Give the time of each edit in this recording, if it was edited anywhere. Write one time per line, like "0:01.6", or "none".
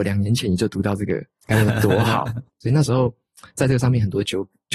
0:02.5